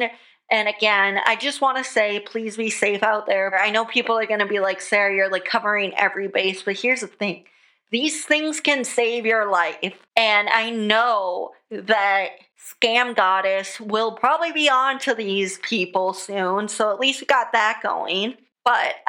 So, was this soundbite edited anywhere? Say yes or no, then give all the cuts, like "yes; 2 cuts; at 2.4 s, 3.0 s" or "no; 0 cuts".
yes; 1 cut; at 3.5 s